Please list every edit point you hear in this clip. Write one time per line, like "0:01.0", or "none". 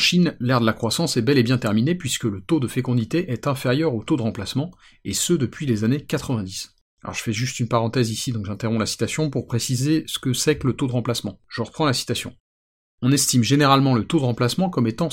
0:11.4